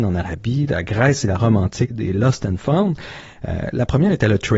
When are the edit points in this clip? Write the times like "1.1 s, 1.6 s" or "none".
1.9 s, 3.4 s